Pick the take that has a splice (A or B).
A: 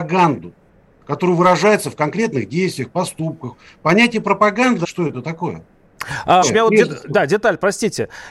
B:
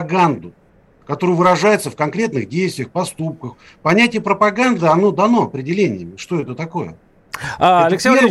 A